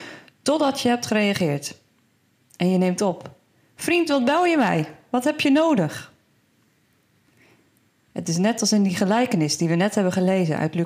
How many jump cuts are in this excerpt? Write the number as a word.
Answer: zero